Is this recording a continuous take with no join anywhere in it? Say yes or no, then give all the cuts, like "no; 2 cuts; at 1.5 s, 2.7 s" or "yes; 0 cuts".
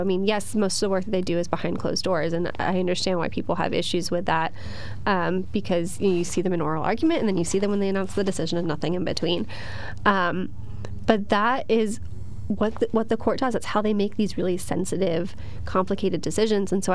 yes; 0 cuts